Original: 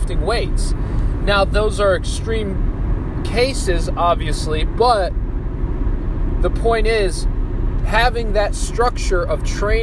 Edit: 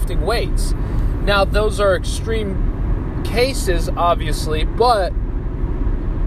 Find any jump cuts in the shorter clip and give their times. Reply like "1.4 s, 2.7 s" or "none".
none

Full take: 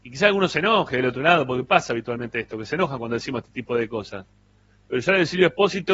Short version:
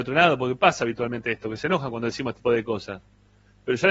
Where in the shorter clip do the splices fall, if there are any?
2.4 s

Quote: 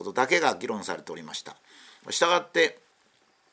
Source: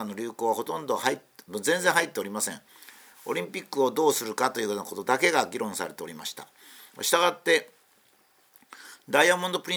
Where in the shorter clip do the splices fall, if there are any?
none

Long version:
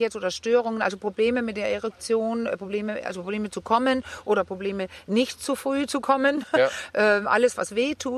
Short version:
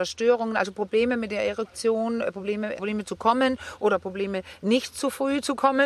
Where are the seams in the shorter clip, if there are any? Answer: 2.8 s

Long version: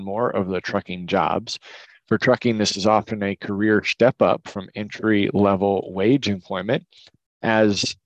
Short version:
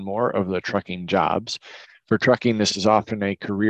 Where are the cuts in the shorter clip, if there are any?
none

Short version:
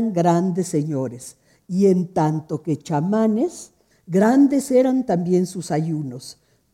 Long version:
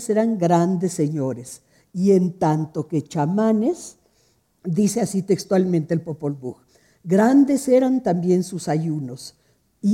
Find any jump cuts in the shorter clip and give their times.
3.9 s

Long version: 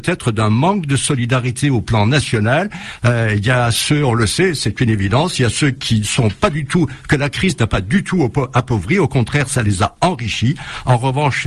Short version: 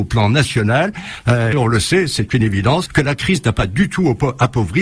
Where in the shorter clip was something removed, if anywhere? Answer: 1.5 s, 2.9 s

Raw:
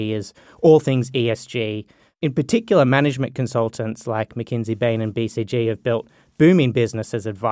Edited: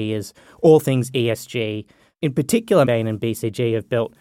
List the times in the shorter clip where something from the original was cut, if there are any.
2.9 s

